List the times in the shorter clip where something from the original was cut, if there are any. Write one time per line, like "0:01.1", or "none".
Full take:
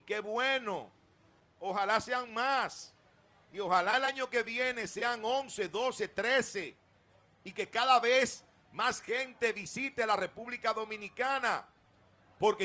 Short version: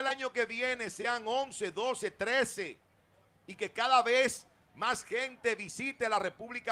none